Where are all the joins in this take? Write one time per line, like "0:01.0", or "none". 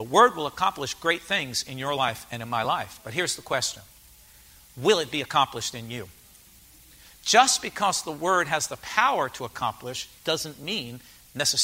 none